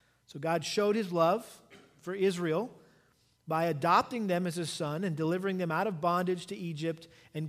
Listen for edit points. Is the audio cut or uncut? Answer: uncut